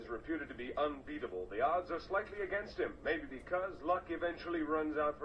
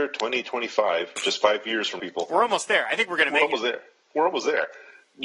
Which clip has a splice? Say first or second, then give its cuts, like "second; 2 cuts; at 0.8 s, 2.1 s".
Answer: second; 1 cut; at 2.0 s